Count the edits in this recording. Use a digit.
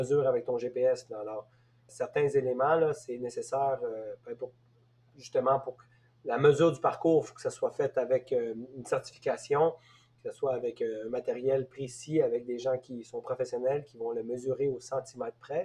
1